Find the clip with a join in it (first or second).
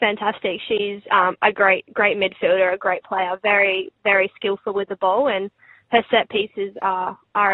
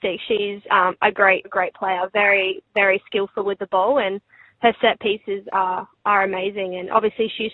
second